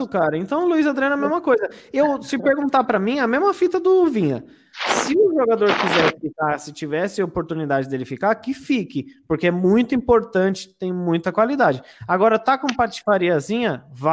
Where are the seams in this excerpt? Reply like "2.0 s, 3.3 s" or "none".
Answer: none